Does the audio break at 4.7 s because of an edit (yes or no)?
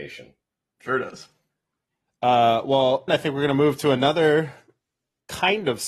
no